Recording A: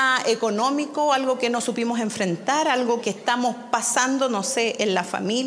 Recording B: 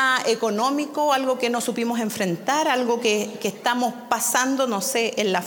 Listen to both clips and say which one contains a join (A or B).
A